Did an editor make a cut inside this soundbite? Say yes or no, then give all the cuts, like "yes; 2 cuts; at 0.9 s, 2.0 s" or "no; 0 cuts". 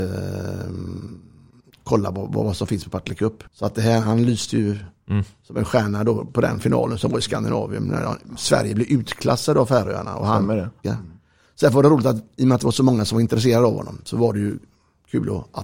yes; 2 cuts; at 3.5 s, 10.8 s